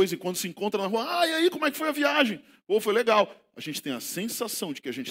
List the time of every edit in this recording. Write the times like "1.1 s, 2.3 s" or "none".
none